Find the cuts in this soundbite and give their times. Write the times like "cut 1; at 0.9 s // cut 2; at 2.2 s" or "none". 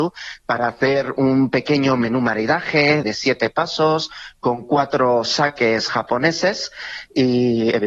cut 1; at 3.0 s